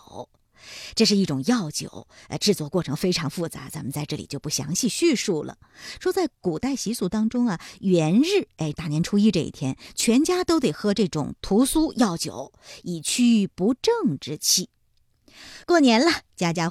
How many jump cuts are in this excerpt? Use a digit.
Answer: 2